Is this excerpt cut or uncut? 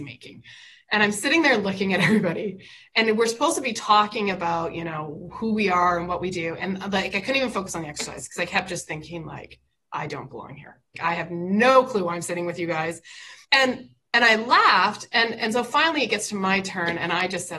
cut